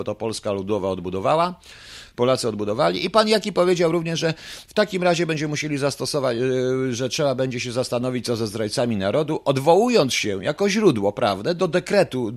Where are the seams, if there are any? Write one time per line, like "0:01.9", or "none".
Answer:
none